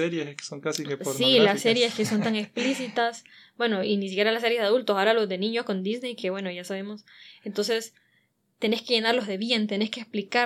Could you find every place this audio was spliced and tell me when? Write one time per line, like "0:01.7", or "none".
none